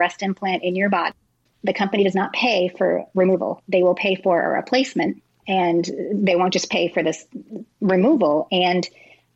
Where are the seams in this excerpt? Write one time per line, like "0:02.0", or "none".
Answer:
none